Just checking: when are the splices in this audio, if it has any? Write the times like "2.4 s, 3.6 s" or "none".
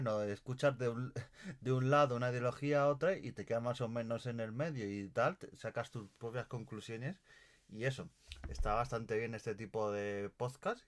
none